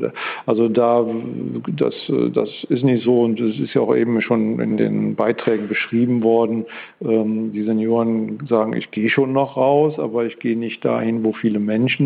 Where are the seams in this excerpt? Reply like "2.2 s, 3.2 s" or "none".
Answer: none

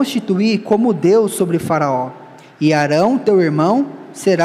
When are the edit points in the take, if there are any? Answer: none

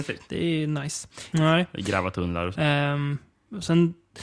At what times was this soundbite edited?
1.3 s, 2.6 s

